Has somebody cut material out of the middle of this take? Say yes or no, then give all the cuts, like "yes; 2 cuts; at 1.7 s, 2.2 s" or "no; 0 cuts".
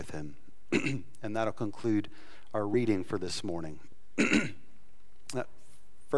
no; 0 cuts